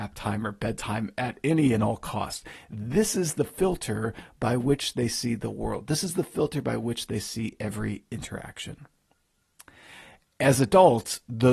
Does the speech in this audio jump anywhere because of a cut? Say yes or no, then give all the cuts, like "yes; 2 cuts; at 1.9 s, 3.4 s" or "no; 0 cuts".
no; 0 cuts